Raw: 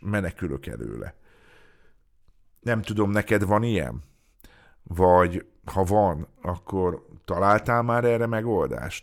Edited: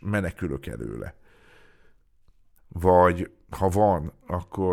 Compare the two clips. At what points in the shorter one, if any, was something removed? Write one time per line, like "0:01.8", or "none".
0:02.6